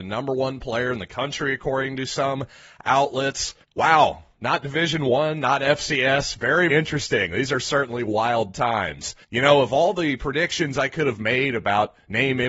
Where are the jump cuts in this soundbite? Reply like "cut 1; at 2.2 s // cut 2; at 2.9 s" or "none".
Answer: cut 1; at 3.6 s // cut 2; at 6.7 s // cut 3; at 9.2 s